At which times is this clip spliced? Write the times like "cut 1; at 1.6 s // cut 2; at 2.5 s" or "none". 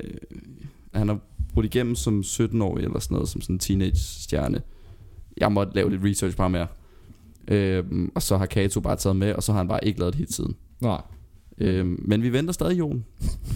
cut 1; at 0.9 s